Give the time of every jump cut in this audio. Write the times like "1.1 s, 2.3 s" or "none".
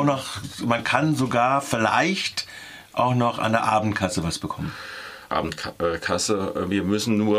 5.3 s